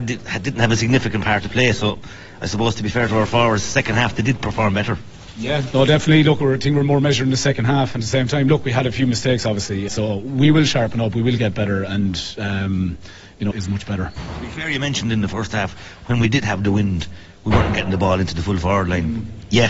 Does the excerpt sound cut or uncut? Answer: cut